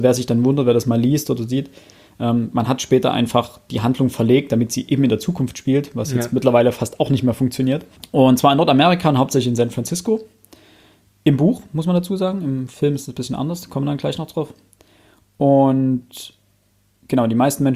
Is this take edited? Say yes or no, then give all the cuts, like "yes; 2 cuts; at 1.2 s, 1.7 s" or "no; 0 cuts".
no; 0 cuts